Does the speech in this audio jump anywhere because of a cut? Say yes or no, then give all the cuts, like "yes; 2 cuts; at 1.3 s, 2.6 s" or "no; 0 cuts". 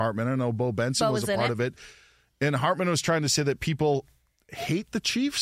no; 0 cuts